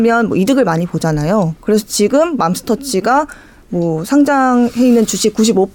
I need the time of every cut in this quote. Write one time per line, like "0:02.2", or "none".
none